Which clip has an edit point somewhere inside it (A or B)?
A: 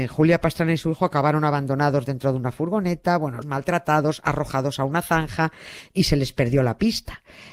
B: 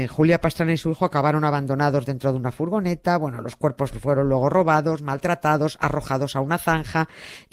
A